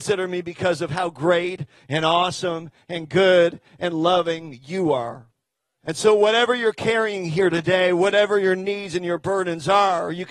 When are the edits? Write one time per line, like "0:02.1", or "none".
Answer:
0:05.8